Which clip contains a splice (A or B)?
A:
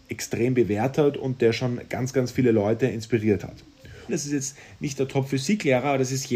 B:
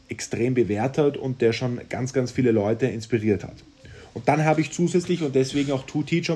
A